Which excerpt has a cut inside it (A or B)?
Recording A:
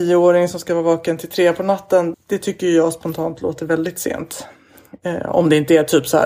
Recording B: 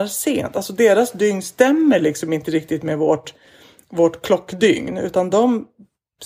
A